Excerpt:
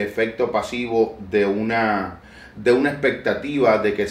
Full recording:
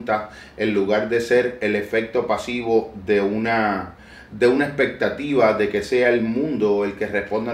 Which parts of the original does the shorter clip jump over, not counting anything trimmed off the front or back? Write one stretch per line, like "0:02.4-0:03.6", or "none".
none